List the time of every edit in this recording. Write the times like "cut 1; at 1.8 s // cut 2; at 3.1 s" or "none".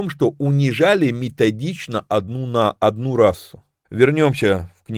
cut 1; at 3.8 s